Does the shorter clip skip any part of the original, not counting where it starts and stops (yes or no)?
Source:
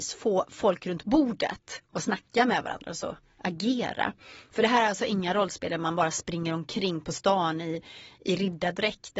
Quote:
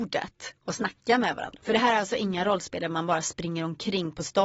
yes